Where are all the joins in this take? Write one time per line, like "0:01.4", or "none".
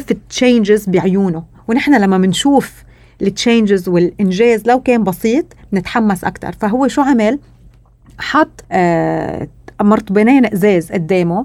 0:08.6